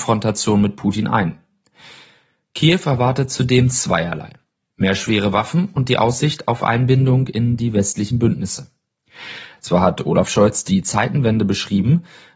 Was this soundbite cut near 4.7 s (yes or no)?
no